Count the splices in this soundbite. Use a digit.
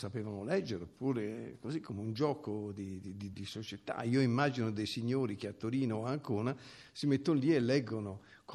1